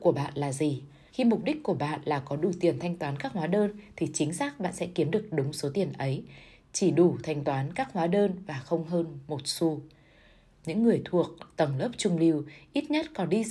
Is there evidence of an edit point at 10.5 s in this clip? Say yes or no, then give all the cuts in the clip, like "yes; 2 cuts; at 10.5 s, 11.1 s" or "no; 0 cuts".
no; 1 cut; at 1.1 s